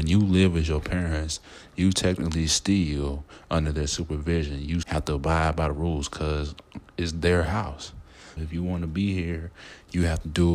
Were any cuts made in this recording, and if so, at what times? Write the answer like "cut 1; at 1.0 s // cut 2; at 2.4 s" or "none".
cut 1; at 4.8 s // cut 2; at 8.4 s